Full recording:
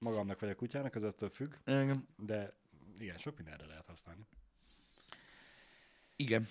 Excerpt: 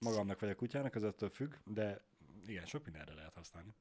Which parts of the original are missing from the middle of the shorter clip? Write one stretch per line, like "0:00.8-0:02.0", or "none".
0:01.6-0:02.1